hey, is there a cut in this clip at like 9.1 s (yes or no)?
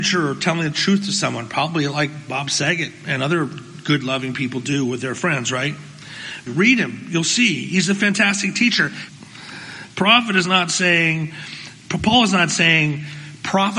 yes